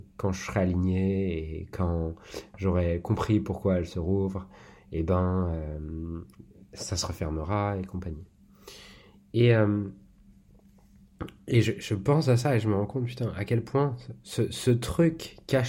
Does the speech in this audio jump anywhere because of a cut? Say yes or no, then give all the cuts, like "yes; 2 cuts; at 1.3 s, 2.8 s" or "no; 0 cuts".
no; 0 cuts